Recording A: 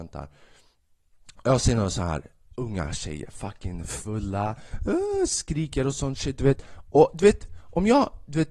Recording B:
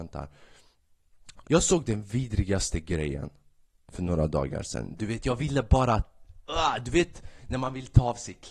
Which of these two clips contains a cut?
B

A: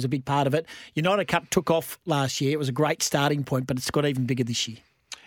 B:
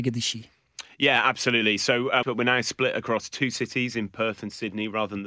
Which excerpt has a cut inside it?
B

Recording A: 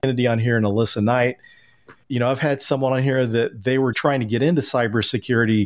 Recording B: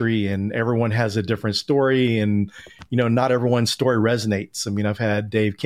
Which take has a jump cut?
A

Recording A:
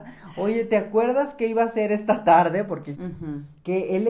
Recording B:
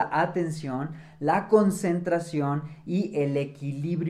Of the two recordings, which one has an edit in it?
A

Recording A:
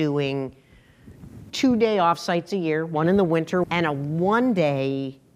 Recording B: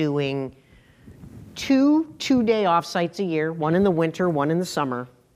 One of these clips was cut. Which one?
A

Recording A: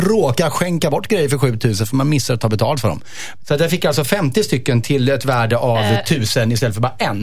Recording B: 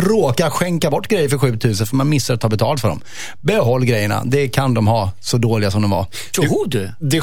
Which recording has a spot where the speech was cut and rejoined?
A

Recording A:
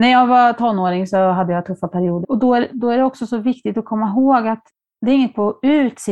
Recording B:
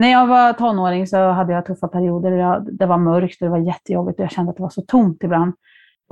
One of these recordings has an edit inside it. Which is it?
A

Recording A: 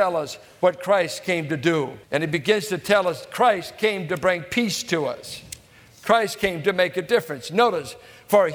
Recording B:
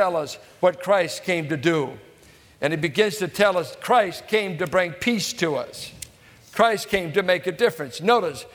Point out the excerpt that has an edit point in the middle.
A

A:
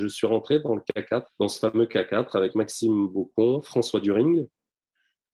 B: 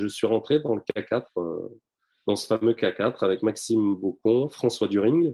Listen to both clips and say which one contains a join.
A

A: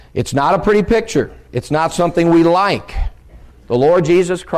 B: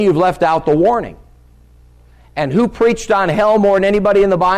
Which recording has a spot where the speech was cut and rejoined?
A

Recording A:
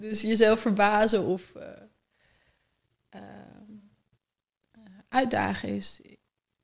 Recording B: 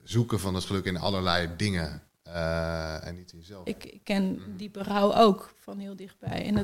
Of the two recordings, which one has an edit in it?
B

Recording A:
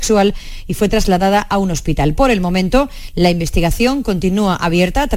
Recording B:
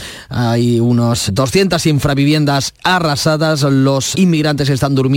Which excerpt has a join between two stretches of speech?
B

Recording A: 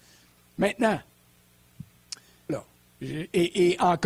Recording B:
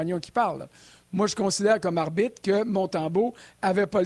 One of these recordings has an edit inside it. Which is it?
A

